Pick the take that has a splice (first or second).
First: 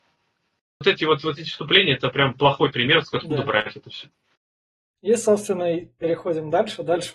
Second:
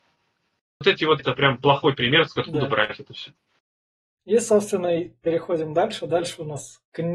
second